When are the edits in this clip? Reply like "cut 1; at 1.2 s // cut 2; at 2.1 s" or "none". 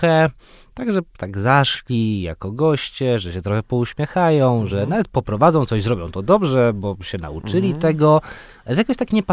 none